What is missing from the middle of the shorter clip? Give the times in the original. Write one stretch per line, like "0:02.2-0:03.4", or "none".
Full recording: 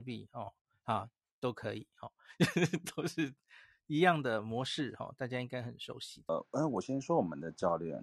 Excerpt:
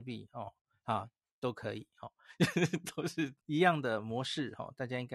0:03.4-0:03.8